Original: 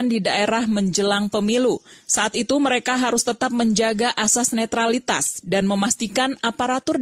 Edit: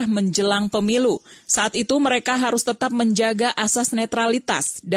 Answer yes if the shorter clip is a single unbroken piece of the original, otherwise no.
yes